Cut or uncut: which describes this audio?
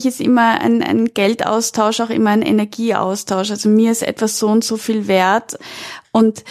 cut